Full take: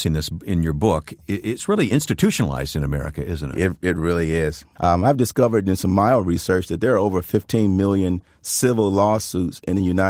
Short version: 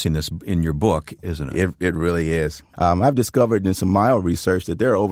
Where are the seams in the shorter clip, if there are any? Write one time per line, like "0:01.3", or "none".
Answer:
0:01.2